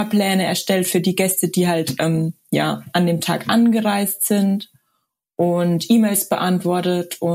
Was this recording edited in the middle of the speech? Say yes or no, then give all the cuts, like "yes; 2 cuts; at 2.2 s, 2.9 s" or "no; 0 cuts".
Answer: no; 0 cuts